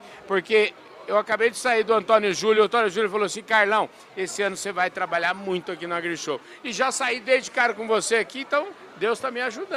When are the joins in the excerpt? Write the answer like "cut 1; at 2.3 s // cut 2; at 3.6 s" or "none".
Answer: none